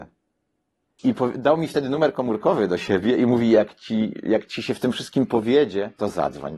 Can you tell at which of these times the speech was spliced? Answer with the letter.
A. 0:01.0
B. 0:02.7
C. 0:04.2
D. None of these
A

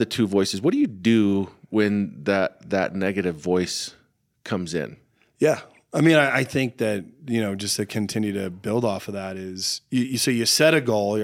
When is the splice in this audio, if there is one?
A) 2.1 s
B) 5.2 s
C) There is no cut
C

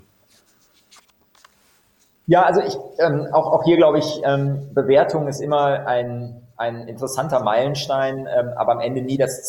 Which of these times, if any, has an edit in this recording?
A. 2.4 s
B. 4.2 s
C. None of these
C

